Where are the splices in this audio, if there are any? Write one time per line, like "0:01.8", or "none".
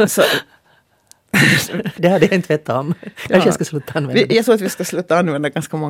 0:02.0